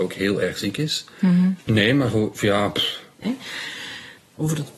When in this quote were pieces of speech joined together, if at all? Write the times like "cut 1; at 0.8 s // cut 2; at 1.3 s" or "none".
cut 1; at 1.6 s // cut 2; at 3.2 s